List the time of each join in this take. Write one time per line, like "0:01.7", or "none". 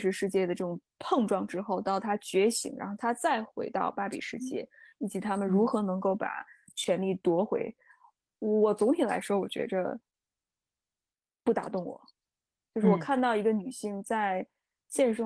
none